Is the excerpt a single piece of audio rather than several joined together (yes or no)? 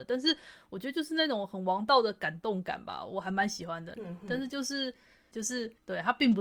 no